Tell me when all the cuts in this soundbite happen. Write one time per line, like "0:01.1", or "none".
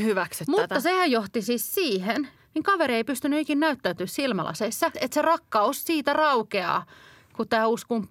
0:02.4
0:04.9